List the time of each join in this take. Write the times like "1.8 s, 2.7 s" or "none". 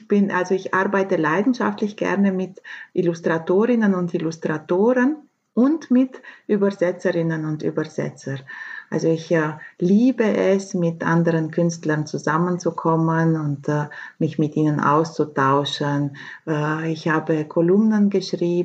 16.4 s